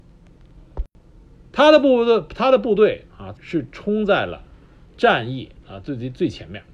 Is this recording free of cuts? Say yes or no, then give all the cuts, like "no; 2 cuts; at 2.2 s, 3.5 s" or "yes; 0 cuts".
no; 1 cut; at 3.4 s